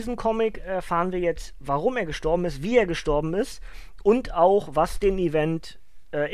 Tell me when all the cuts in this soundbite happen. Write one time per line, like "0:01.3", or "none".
none